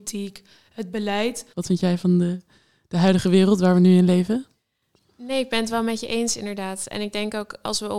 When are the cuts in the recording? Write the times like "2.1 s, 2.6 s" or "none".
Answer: 1.5 s